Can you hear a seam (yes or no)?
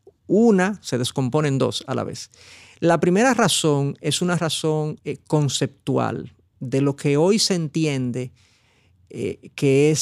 no